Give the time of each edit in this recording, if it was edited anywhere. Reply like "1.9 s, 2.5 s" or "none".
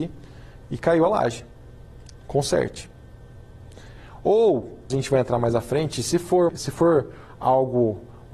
4.9 s, 6.5 s